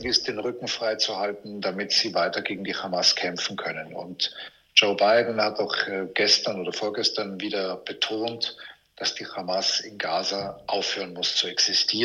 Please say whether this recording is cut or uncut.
uncut